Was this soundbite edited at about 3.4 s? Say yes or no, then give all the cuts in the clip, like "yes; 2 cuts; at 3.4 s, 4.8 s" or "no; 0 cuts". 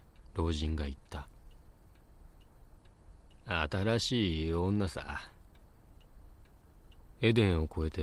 no; 0 cuts